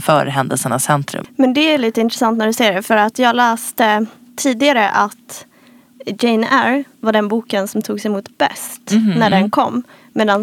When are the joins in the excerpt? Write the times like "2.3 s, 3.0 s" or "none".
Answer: 1.2 s

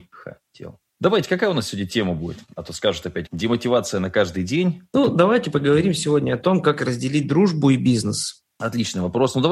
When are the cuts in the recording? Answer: 3.3 s

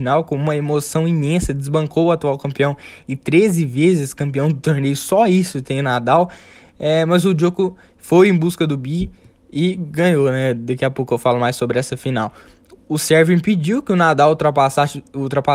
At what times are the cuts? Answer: none

